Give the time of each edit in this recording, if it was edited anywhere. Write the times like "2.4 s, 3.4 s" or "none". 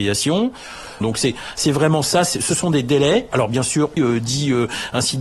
1.0 s, 4.0 s